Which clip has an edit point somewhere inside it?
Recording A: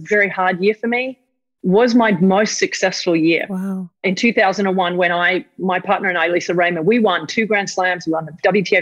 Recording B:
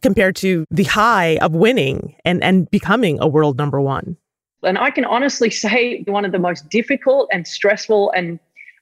B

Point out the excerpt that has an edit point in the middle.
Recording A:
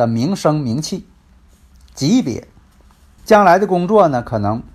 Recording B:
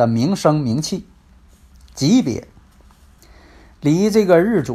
A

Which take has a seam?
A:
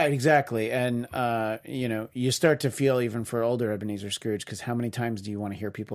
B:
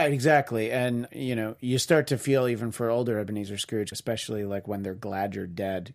B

